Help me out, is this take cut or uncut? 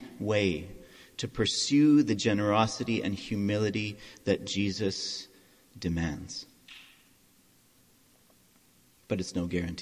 uncut